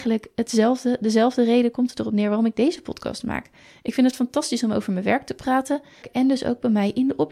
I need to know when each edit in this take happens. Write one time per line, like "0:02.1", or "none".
0:06.0

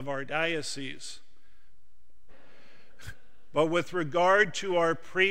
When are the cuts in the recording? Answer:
0:02.3

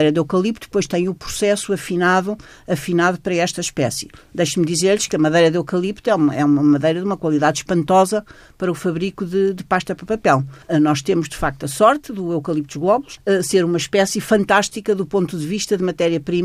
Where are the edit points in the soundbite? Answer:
0:10.6
0:13.2

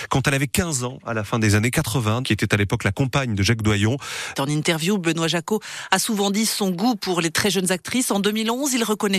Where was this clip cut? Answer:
0:02.2
0:04.3

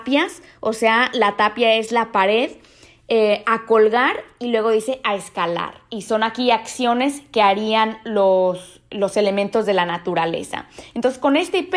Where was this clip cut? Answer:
none

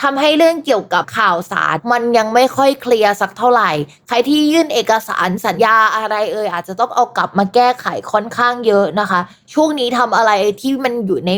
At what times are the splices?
0:05.6

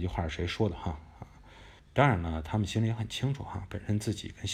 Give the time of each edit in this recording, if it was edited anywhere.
0:01.8

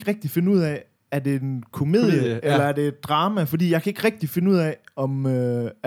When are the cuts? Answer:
none

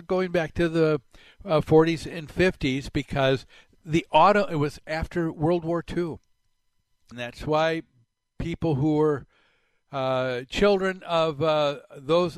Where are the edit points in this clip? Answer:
0:07.1

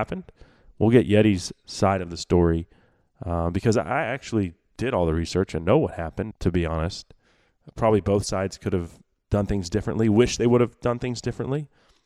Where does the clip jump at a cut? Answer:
0:06.3

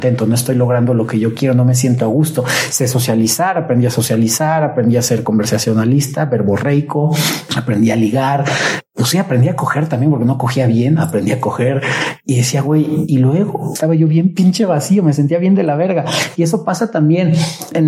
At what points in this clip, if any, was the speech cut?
none

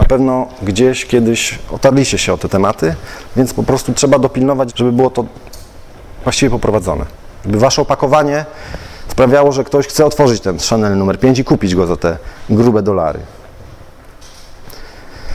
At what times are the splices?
0:04.7

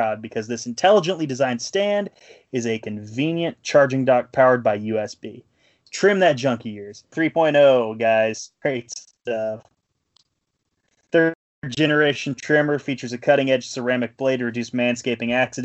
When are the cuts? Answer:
0:05.8
0:07.1
0:08.6

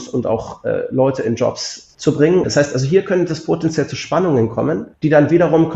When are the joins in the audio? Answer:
0:02.4

